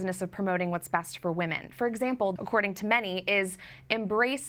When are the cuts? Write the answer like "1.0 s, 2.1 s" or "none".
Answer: 2.4 s

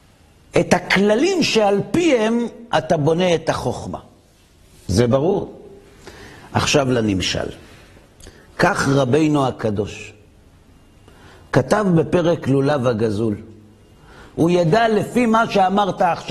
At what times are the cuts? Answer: 14.3 s

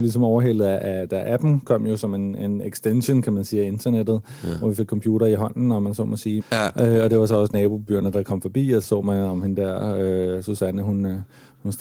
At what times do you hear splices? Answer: 6.4 s, 8.8 s

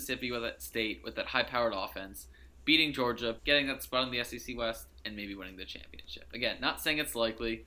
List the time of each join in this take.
3.4 s

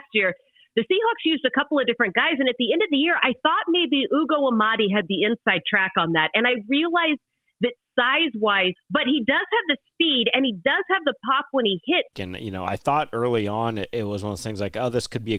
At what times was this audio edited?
8.8 s, 12.1 s

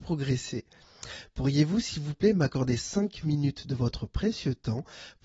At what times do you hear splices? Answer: none

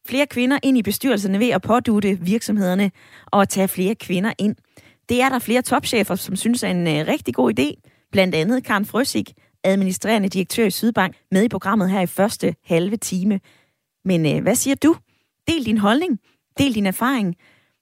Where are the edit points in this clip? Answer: 11.1 s

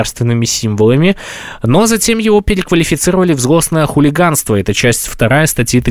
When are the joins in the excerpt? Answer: none

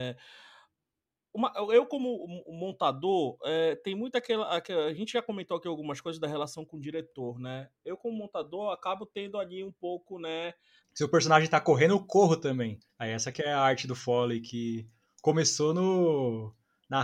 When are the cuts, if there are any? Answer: 10.8 s, 12.9 s

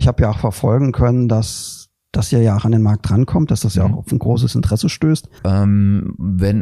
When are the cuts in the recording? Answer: 5.4 s

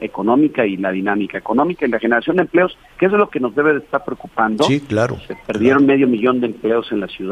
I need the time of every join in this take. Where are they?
none

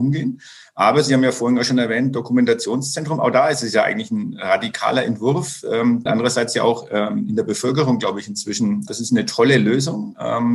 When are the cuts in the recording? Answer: 6.1 s, 8.9 s

